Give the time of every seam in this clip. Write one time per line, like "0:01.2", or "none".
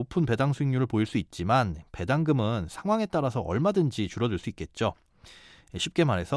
none